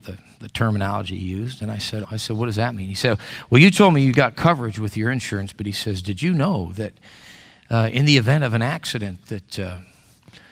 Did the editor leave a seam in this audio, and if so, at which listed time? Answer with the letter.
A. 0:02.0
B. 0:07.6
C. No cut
A